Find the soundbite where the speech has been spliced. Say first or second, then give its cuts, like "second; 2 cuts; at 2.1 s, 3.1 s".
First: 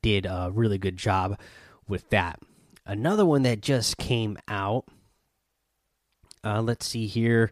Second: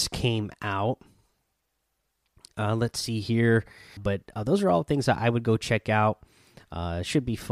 second; 1 cut; at 4.0 s